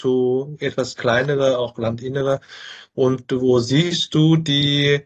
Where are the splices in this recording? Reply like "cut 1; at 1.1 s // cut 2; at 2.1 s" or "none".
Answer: none